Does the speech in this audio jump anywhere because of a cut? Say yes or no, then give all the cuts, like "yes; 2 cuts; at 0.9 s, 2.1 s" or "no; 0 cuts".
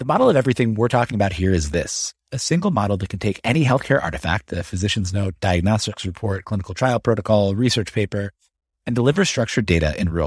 no; 0 cuts